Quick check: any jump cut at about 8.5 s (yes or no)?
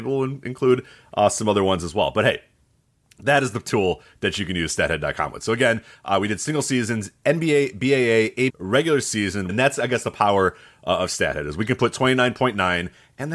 yes